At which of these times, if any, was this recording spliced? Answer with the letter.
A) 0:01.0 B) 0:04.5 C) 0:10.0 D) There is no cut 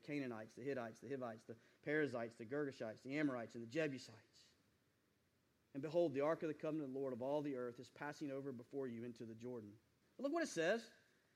C